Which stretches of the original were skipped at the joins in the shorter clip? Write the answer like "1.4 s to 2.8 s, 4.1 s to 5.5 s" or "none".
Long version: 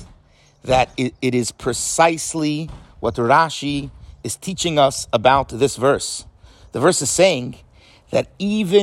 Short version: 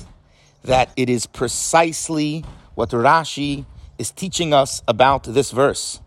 0.9 s to 1.2 s

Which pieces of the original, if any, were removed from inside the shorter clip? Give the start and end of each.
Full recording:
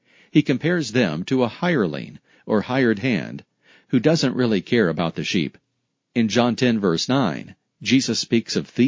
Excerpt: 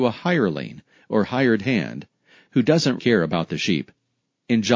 4.3 s to 4.6 s

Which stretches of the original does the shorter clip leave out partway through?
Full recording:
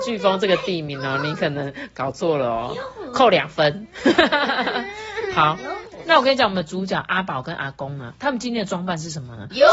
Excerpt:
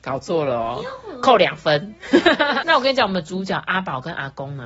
4.5 s to 6.0 s

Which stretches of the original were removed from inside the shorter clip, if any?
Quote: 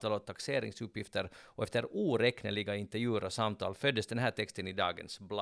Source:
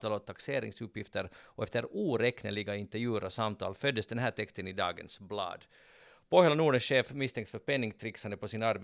none

